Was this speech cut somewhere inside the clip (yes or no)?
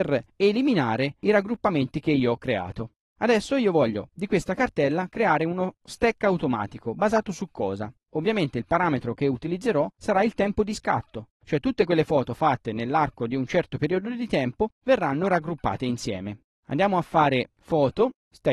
yes